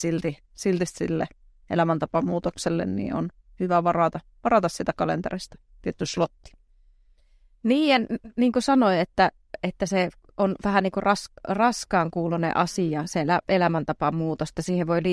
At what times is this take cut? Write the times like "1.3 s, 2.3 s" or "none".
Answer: none